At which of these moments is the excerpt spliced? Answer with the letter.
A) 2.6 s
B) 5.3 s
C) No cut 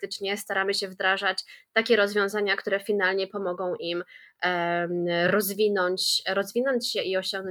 C